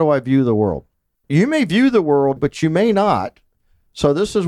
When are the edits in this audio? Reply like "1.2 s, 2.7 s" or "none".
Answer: 1.1 s, 2.4 s